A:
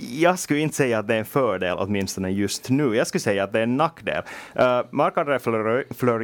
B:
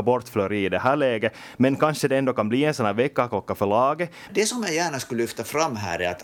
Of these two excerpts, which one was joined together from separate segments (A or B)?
B